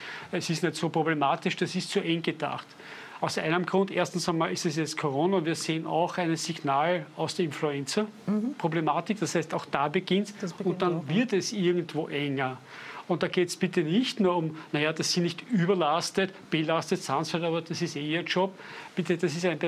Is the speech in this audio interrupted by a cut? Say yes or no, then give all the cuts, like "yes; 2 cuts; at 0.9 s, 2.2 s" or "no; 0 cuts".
no; 0 cuts